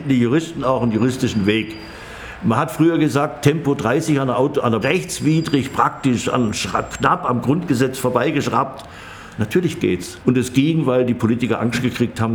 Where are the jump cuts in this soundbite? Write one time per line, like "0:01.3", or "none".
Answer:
0:04.8
0:10.2